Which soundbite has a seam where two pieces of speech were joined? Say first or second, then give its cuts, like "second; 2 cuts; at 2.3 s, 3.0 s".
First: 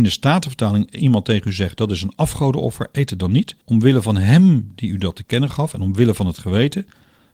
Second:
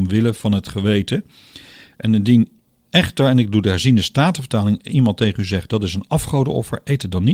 first; 1 cut; at 3.6 s